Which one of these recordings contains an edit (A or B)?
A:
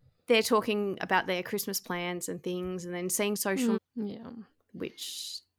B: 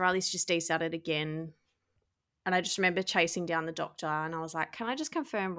A